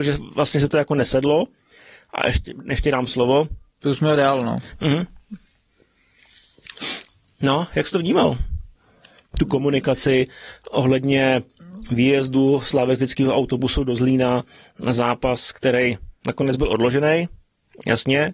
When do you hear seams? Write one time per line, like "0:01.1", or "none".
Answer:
0:04.7